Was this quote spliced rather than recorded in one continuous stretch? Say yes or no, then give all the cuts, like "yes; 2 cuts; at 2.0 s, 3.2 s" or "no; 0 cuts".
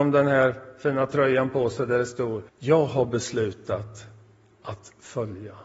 yes; 1 cut; at 2.5 s